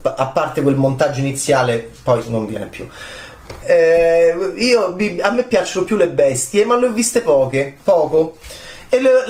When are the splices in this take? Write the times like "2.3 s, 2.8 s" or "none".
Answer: 3.6 s